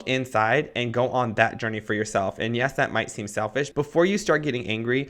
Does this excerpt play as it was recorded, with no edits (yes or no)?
no